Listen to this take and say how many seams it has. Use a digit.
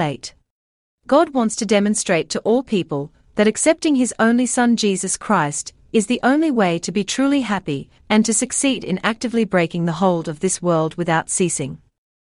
2